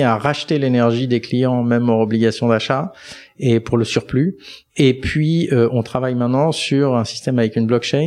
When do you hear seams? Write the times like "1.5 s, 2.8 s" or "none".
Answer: none

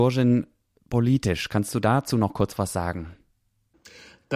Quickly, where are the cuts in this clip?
none

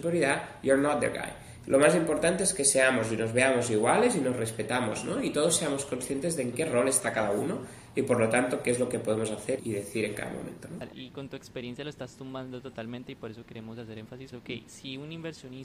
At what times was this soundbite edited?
9.6 s, 10.9 s, 14.3 s

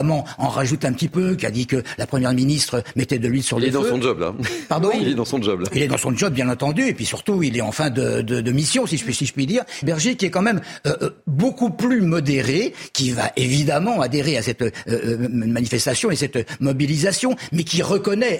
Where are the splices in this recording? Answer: 9.8 s

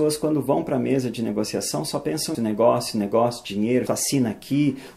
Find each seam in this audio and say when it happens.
2.3 s, 3.9 s

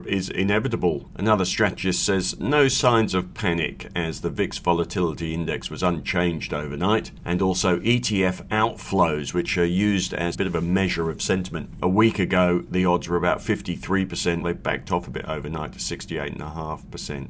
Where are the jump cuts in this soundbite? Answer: 10.3 s, 11.8 s, 14.4 s

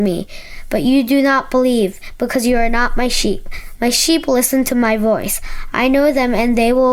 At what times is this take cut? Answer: none

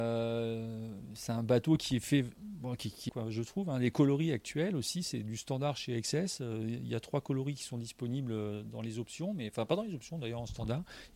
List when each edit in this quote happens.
3.1 s

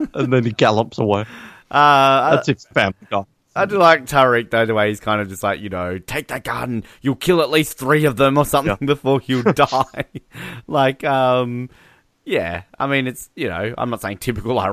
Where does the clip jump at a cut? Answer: 3.6 s

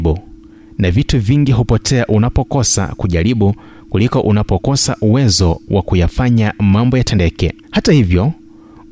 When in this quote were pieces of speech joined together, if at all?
7.6 s

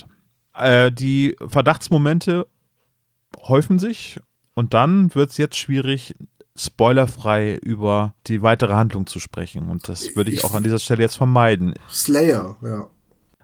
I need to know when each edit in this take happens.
8.2 s, 11.8 s

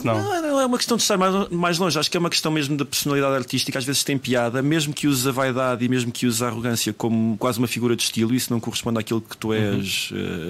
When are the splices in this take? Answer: none

